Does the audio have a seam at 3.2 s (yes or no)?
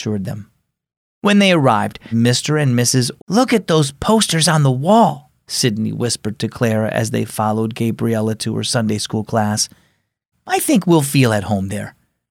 yes